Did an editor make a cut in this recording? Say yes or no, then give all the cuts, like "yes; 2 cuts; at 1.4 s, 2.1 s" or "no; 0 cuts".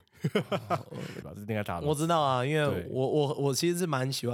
yes; 1 cut; at 1.2 s